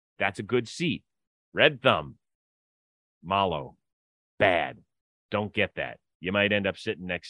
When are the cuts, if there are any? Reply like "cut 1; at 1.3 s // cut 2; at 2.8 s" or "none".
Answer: none